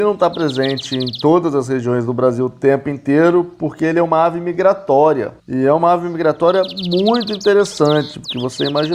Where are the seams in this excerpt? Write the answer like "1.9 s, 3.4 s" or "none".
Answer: 5.4 s